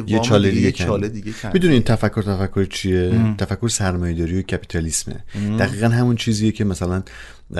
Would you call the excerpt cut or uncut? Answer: uncut